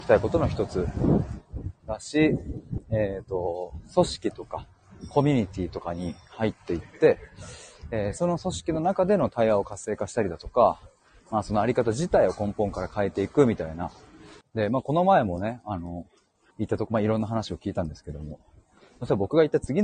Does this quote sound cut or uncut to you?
cut